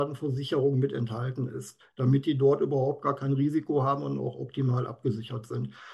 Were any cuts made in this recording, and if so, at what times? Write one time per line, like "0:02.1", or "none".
none